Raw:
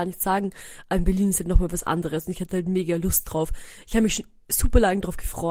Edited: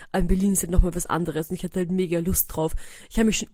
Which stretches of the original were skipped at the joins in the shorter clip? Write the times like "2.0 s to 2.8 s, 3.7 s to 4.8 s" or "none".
none

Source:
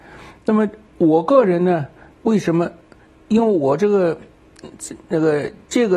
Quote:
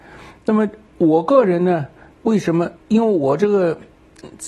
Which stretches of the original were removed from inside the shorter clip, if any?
2.8 s to 3.2 s

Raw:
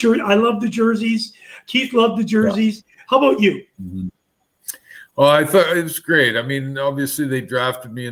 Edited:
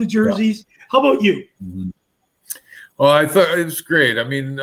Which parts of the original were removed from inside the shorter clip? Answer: none

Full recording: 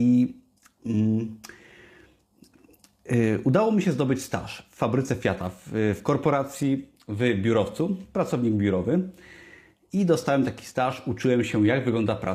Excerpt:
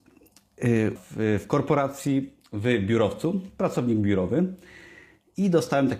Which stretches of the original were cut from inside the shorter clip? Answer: 3.4 s to 5.5 s

